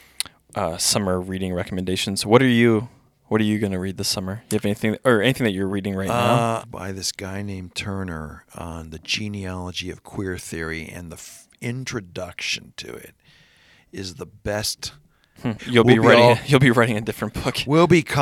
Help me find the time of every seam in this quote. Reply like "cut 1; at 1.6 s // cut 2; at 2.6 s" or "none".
cut 1; at 6.6 s // cut 2; at 15.6 s